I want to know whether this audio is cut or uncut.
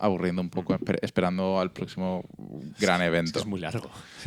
uncut